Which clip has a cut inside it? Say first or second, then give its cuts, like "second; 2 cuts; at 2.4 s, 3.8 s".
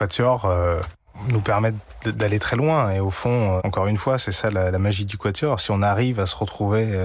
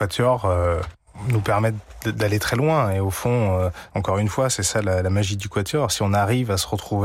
first; 1 cut; at 3.6 s